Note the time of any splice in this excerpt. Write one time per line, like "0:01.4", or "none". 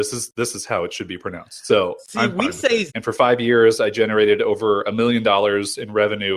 0:02.9